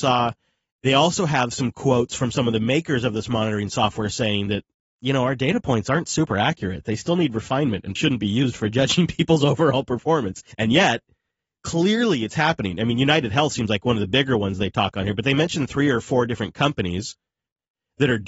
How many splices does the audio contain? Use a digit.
2